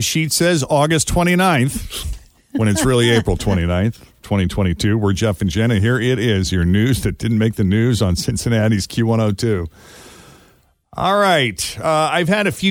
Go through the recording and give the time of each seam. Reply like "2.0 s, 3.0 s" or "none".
none